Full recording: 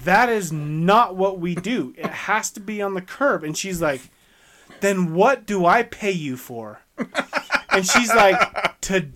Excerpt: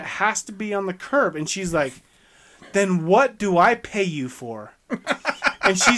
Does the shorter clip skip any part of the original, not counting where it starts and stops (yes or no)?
no